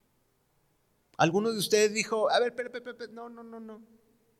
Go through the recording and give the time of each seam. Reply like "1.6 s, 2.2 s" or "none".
none